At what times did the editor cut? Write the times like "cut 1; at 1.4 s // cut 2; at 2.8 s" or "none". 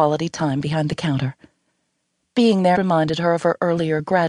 cut 1; at 2.7 s